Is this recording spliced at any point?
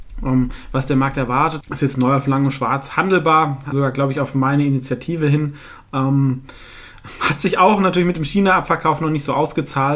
yes; 2 cuts; at 1.6 s, 3.7 s

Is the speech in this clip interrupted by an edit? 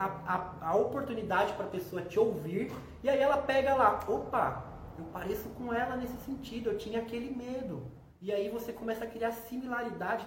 yes; 1 cut; at 8.1 s

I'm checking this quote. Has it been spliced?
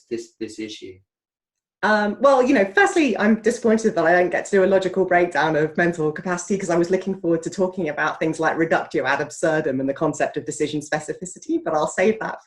no; 0 cuts

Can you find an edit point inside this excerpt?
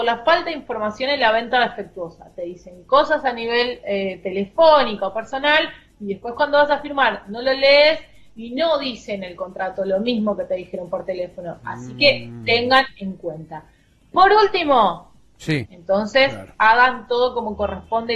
yes; 1 cut; at 15.6 s

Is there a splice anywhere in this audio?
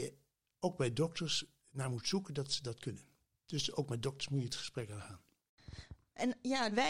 no; 0 cuts

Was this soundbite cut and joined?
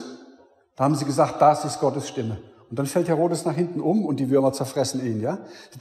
no; 0 cuts

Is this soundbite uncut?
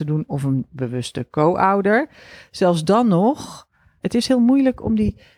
no; 1 cut; at 4.0 s

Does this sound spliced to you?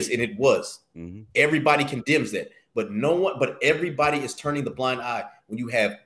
no; 0 cuts

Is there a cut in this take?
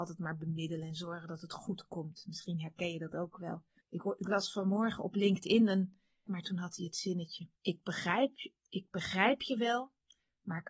yes; 3 cuts; at 3.8 s, 6.3 s, 7.6 s

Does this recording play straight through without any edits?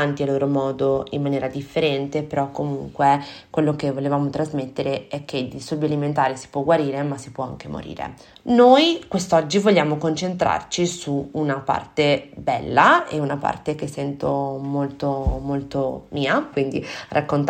no; 2 cuts; at 8.3 s, 16.5 s

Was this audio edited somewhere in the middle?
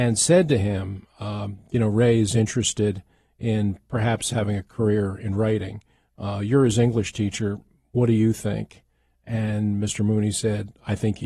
no; 0 cuts

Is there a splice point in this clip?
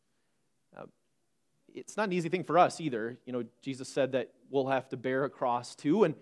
no; 0 cuts

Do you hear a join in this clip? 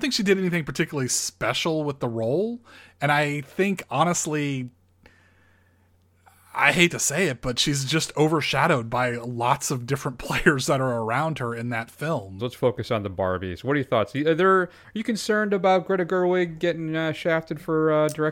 yes; 1 cut; at 12.4 s

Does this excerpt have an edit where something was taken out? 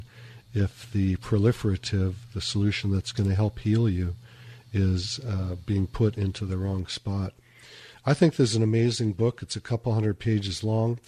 no; 0 cuts

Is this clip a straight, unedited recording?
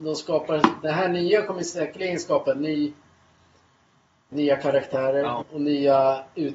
no; 2 cuts; at 4.3 s, 5.4 s

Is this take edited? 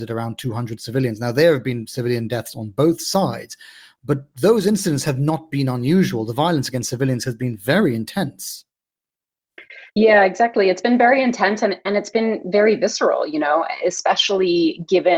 yes; 1 cut; at 9.9 s

